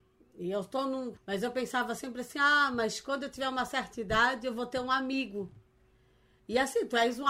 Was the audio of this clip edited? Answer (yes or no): yes